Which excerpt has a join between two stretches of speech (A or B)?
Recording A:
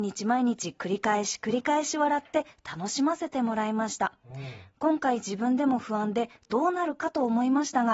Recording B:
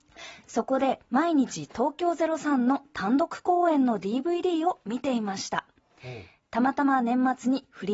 B